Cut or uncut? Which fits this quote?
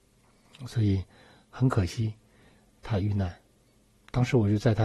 uncut